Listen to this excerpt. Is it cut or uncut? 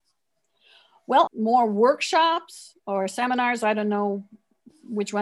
cut